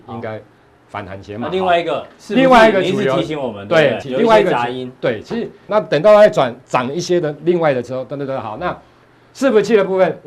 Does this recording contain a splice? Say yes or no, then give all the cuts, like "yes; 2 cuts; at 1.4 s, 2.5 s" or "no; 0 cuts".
yes; 2 cuts; at 4.0 s, 5.7 s